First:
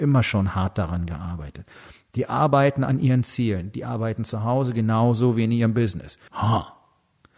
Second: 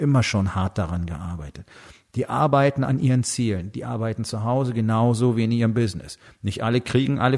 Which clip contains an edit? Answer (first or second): first